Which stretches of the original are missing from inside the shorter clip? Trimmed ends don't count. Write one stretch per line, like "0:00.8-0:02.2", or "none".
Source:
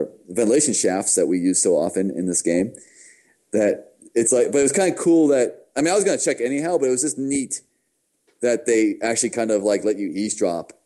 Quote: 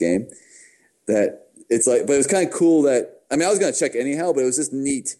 none